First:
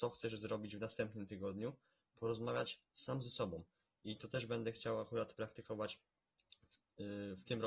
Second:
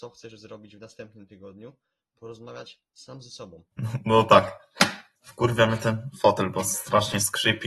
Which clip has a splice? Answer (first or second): second